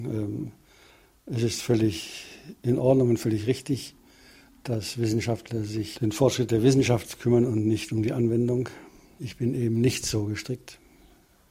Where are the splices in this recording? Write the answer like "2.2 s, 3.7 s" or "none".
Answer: 6.0 s